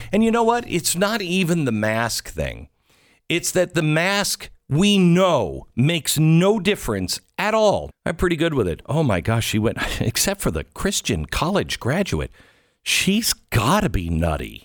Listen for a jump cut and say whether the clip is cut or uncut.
cut